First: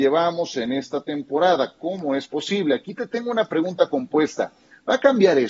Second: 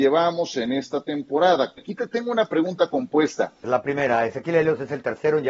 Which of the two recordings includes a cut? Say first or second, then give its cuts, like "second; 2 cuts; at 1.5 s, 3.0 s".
second; 2 cuts; at 1.8 s, 3.6 s